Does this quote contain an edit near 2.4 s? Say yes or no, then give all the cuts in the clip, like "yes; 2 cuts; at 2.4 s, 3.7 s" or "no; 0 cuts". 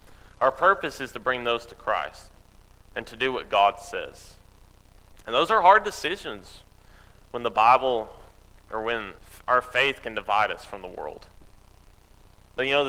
no; 2 cuts; at 5.2 s, 9.2 s